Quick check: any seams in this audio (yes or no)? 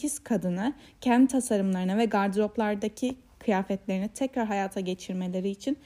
no